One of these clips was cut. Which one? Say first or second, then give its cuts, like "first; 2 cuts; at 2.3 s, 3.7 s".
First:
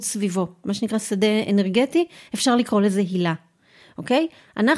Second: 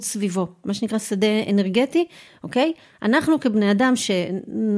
second; 1 cut; at 2.3 s